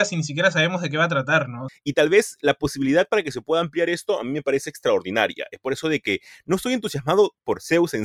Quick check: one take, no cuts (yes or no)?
no